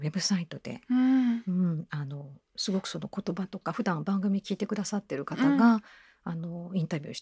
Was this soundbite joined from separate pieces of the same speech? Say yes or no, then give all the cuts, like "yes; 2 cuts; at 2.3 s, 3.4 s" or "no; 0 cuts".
no; 0 cuts